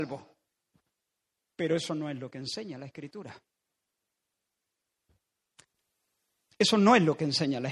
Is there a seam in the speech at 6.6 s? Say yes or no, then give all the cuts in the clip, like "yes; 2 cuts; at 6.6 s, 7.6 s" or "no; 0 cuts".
no; 0 cuts